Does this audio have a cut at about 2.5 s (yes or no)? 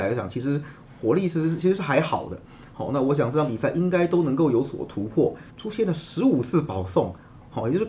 no